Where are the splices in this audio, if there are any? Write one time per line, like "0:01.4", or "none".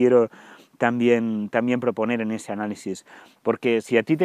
0:03.4